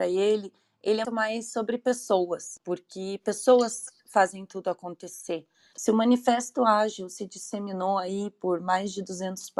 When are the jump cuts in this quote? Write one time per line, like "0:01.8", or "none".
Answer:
0:01.0
0:05.7

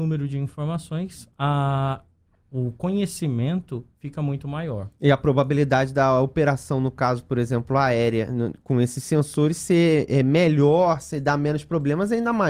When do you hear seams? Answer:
none

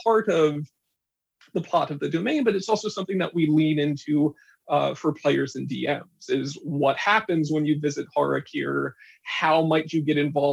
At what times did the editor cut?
none

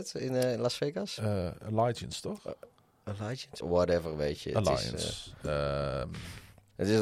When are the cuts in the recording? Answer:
0:03.6

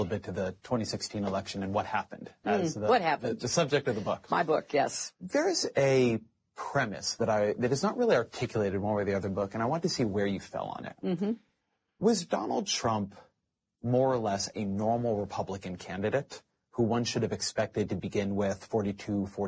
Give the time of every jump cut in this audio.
none

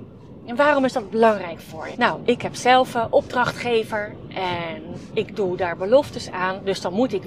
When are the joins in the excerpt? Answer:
0:01.9

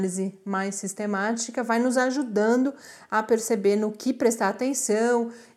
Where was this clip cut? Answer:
none

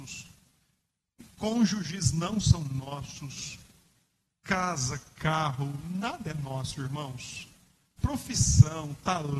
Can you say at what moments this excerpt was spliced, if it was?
none

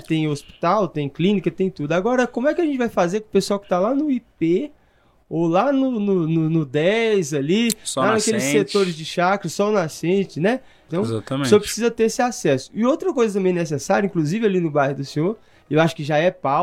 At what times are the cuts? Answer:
0:10.9

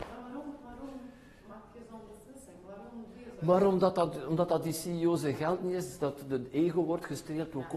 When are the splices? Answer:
none

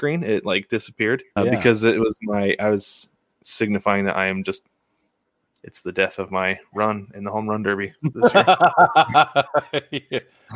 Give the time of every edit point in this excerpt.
0:01.4
0:03.4

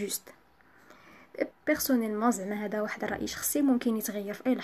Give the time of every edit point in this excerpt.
0:01.5

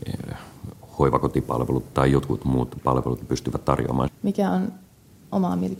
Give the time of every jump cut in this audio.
0:01.9
0:04.1

